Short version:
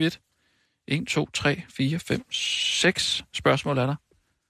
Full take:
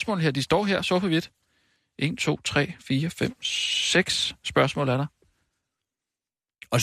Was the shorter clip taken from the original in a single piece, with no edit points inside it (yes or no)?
yes